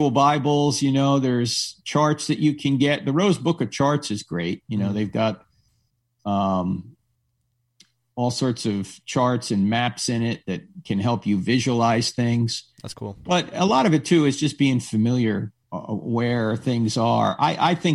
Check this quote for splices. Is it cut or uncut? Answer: cut